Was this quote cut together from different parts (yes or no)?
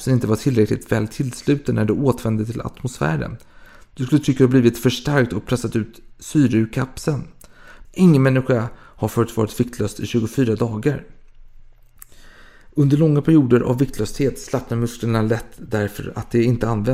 yes